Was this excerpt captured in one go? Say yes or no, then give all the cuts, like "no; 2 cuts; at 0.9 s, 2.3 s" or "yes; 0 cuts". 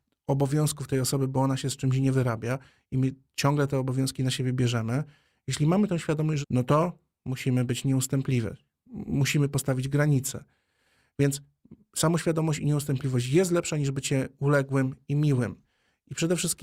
no; 1 cut; at 6.4 s